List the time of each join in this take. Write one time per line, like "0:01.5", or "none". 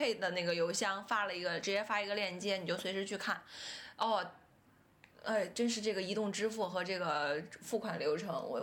none